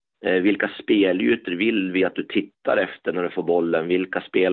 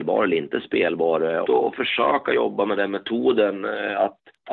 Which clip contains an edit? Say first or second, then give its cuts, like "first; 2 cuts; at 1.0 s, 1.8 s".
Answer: second; 1 cut; at 1.4 s